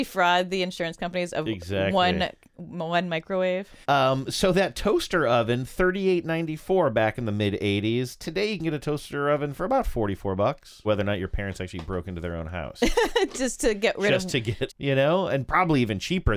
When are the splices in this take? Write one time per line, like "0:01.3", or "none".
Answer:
0:03.8
0:10.8
0:14.7